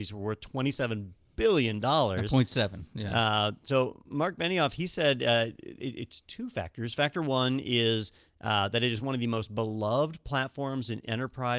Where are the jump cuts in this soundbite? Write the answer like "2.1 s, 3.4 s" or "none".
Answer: none